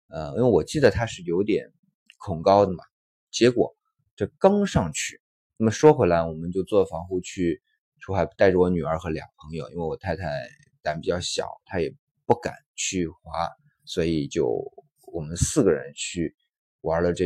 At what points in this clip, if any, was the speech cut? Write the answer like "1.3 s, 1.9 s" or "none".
5.6 s